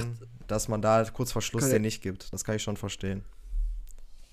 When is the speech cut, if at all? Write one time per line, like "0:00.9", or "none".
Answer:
none